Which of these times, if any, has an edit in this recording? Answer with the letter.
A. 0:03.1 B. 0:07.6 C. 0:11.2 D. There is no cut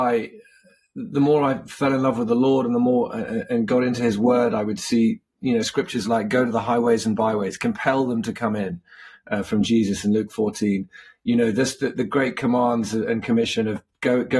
D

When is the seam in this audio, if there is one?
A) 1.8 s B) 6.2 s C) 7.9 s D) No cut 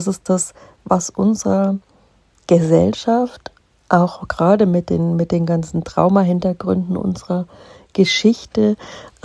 D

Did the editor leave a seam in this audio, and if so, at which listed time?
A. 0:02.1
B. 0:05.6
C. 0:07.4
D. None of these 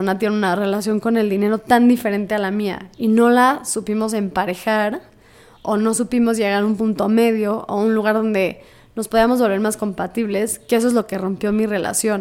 D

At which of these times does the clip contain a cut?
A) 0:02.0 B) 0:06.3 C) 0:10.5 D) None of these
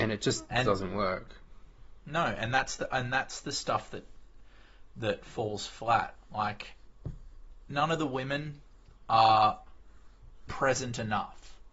C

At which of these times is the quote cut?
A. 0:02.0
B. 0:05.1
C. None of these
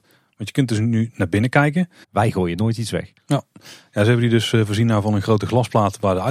A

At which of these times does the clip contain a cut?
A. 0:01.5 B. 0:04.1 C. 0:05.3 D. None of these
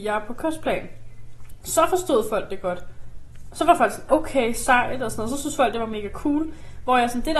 B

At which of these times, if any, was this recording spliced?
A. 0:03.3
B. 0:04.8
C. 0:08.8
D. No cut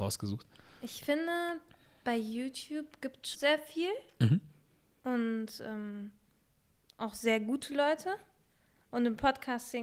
A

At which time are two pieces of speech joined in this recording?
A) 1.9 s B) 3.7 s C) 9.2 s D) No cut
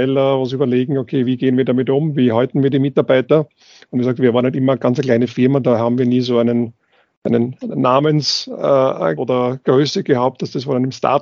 C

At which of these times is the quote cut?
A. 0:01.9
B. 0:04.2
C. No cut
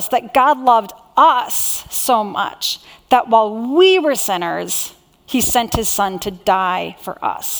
B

